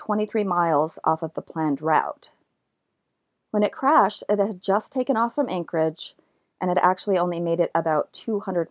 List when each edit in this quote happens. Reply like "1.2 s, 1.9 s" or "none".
none

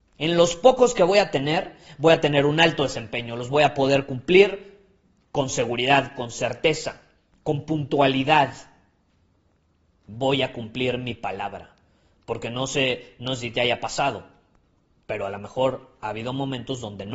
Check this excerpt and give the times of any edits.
none

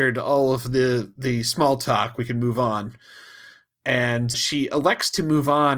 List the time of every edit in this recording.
4.3 s

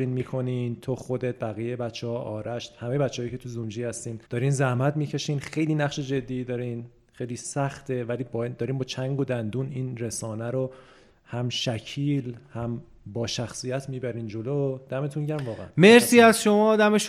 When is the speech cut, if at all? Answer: 4.2 s

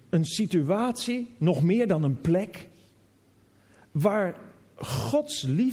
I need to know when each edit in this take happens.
none

